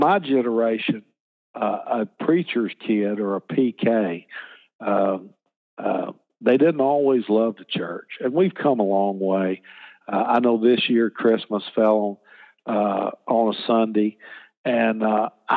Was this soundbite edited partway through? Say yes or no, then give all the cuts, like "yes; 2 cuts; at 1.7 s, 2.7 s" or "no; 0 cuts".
no; 0 cuts